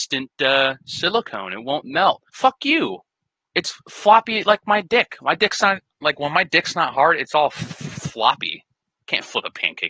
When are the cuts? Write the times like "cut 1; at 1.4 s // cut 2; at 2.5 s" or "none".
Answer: cut 1; at 2.3 s